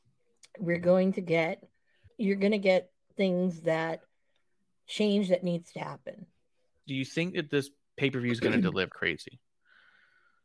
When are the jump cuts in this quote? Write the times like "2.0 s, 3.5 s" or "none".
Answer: 2.1 s, 6.8 s, 8.9 s